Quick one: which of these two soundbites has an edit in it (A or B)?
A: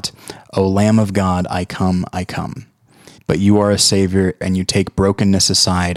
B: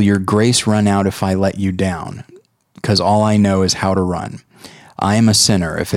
A